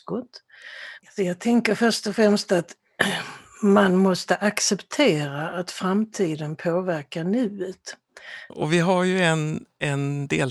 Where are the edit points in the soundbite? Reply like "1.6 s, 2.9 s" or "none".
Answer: 1.0 s, 8.5 s